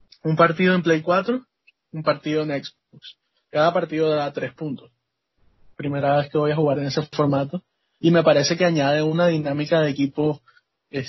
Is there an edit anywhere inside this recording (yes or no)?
yes